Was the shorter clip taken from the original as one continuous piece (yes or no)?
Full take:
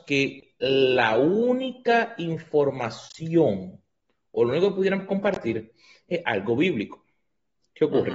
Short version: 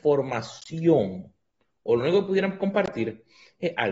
yes